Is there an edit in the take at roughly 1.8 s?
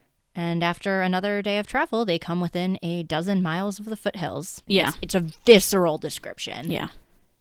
no; 1 cut; at 4.7 s

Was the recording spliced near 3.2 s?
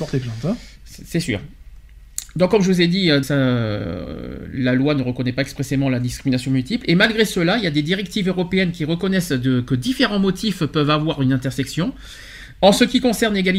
yes; 1 cut; at 3.2 s

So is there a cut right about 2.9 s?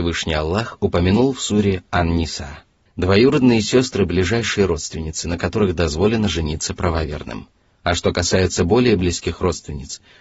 yes; 1 cut; at 2.9 s

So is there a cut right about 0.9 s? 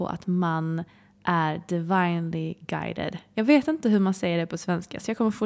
no; 0 cuts

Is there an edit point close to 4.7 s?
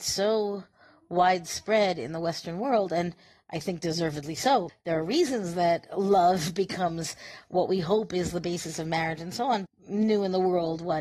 yes; 2 cuts; at 4.7 s, 9.7 s

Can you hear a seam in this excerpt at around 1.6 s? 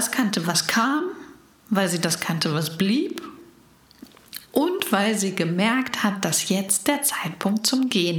no; 0 cuts

